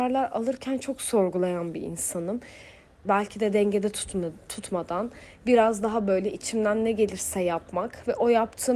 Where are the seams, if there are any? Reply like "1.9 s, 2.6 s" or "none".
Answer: 3.0 s